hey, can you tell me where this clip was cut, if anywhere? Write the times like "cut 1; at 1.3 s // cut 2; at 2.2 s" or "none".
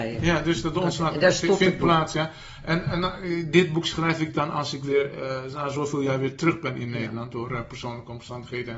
none